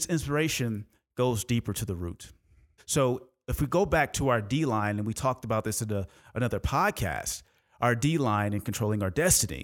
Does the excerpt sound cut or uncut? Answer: cut